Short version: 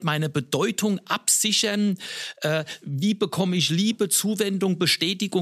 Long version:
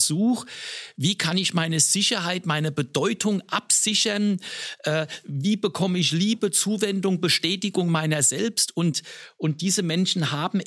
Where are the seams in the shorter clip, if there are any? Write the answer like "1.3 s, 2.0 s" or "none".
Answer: none